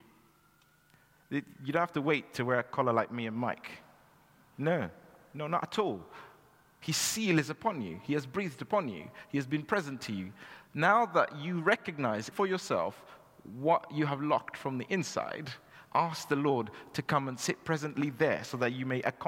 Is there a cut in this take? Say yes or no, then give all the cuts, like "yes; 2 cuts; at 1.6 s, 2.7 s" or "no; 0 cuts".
yes; 1 cut; at 12.3 s